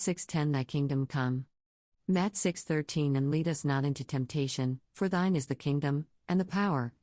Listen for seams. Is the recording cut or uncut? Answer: cut